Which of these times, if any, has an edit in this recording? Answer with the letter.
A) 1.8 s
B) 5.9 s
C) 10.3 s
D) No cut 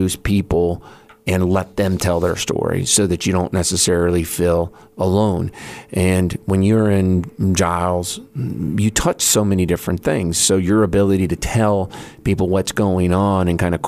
D